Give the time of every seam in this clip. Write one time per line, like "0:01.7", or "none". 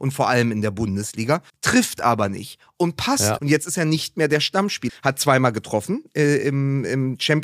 0:01.5
0:03.4
0:04.9